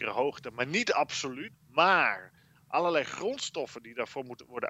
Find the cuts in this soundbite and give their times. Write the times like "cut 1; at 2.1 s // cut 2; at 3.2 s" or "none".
cut 1; at 1.5 s